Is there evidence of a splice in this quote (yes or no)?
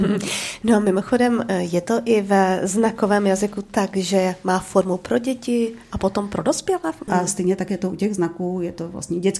yes